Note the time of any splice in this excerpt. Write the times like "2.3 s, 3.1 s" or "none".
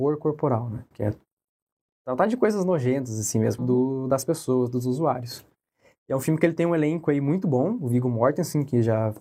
0.9 s, 3.6 s